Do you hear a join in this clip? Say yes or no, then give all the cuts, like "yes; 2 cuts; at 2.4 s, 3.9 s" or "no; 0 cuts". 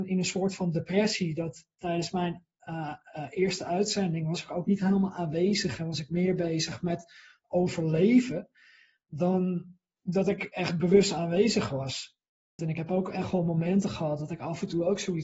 yes; 1 cut; at 12.6 s